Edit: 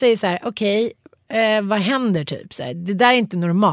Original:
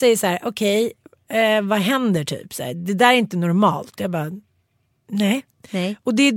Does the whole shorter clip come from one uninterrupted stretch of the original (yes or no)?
yes